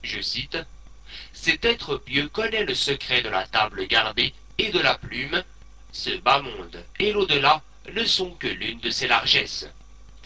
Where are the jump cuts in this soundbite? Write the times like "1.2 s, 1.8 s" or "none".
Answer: none